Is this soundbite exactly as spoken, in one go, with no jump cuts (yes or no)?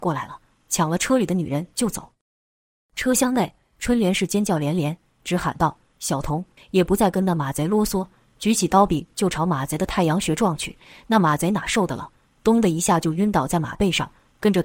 no